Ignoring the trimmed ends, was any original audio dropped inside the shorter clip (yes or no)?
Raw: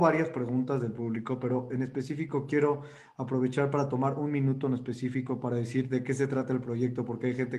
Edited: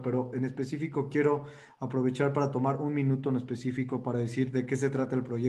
no